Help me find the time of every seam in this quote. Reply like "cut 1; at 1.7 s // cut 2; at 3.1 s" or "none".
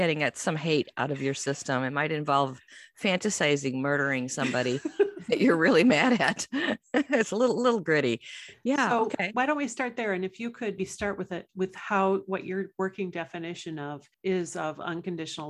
cut 1; at 10.8 s // cut 2; at 14.1 s